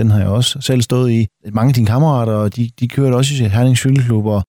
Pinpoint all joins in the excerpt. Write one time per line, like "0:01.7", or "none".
0:01.4
0:02.5